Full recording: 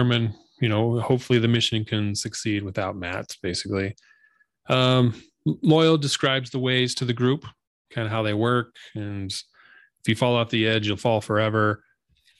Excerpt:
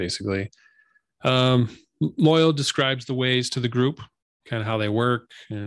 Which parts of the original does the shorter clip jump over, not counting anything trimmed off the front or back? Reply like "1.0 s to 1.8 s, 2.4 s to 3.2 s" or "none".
none